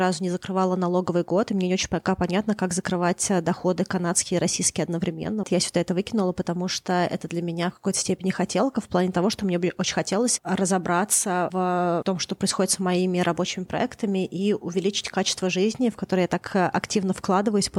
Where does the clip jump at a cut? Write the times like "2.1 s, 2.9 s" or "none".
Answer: 5.4 s

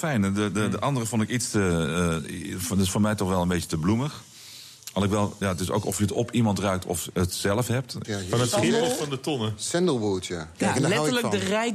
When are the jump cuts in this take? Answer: 5.4 s, 8.0 s, 10.5 s

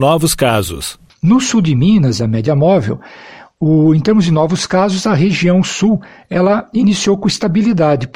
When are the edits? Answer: 2.2 s

